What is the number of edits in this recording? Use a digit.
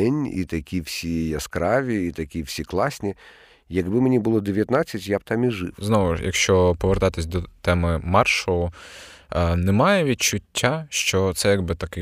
0